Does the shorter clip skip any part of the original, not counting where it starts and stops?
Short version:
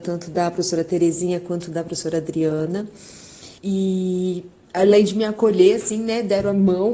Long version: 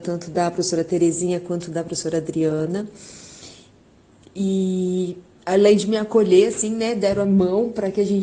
yes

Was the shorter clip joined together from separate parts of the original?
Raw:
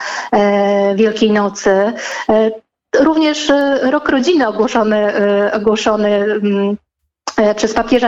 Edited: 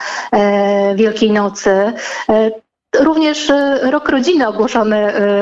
no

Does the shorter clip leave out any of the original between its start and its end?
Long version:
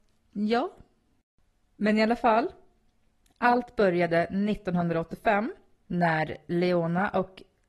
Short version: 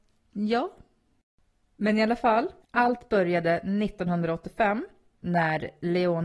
yes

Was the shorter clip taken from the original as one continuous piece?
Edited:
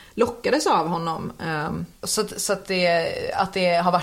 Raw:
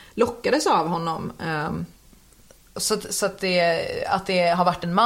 no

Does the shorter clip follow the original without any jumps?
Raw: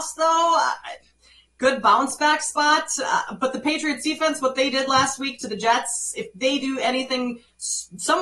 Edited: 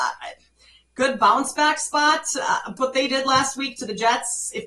no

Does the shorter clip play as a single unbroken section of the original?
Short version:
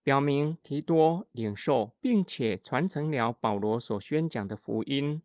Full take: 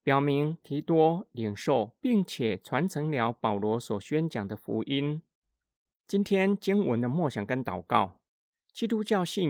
yes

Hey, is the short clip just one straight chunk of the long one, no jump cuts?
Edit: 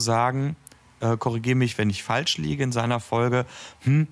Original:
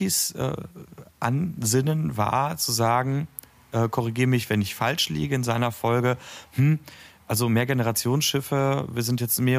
yes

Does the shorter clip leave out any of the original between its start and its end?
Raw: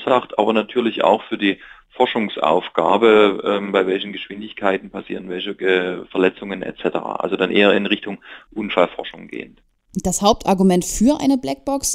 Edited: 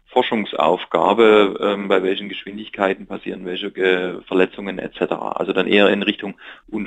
no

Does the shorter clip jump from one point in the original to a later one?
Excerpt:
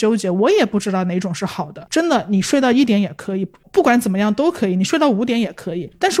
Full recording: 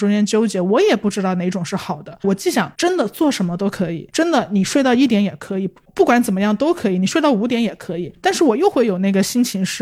yes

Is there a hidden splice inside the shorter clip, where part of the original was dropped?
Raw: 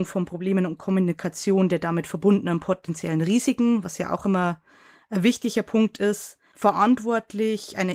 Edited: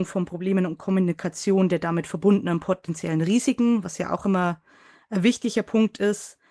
no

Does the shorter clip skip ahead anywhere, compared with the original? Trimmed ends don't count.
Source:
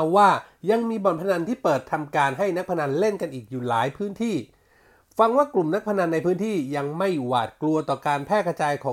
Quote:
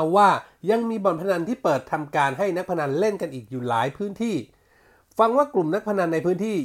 no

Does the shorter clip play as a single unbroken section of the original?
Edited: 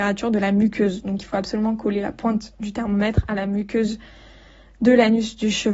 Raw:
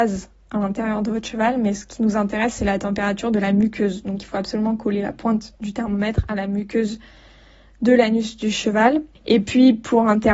yes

